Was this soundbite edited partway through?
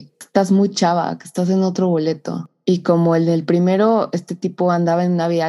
no; 0 cuts

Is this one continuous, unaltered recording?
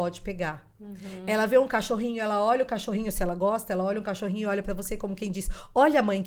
yes; 0 cuts

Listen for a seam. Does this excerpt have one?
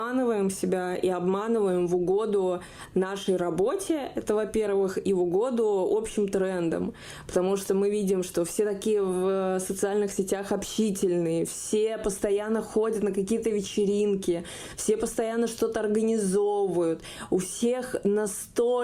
no; 0 cuts

